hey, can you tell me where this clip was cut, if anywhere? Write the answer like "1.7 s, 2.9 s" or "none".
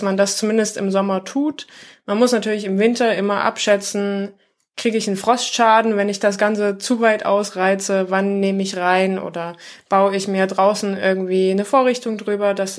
none